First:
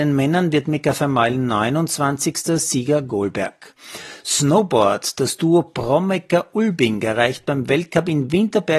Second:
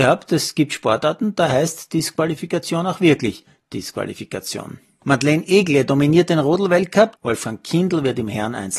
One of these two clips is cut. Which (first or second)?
second